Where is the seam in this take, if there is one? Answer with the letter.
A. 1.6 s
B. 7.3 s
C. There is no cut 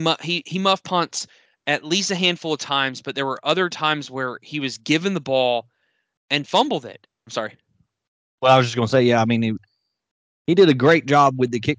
B